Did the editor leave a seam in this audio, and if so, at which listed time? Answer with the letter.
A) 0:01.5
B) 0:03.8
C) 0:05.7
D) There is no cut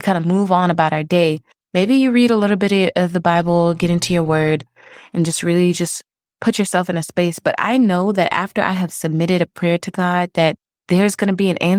A